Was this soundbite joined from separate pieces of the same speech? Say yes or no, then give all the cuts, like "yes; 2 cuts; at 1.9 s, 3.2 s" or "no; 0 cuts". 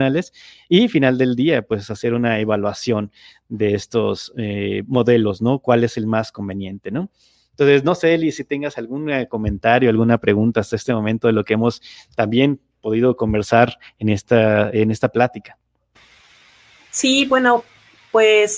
no; 0 cuts